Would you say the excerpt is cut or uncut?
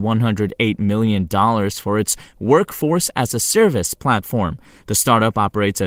uncut